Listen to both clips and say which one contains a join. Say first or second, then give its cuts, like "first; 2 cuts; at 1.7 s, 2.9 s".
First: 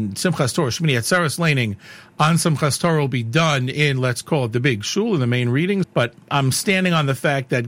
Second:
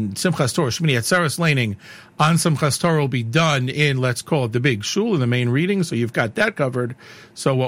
first; 1 cut; at 5.8 s